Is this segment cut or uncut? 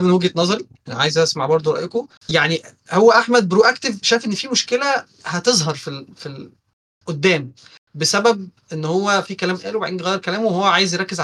cut